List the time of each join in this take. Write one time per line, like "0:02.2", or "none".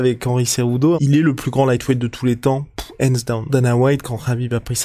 0:00.9
0:03.5

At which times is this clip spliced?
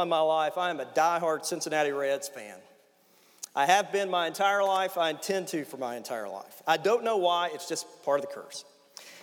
none

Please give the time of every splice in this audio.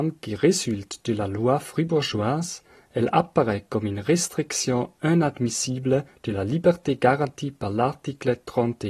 none

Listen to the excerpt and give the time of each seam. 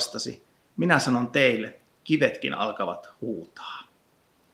0:01.9

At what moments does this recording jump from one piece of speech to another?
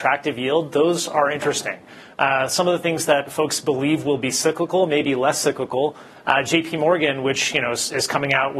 none

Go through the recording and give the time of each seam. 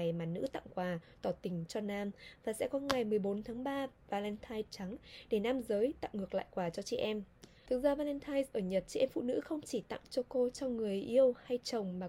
0:07.7

